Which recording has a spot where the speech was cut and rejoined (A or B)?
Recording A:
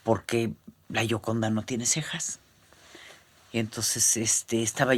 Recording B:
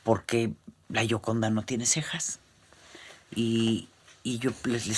B